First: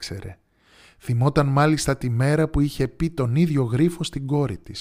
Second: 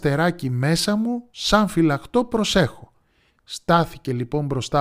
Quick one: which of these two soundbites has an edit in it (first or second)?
second